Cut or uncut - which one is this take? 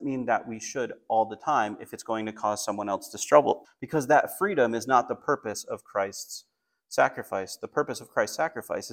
cut